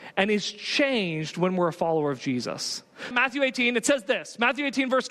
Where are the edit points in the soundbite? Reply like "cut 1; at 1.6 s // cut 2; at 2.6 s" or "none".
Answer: cut 1; at 3.1 s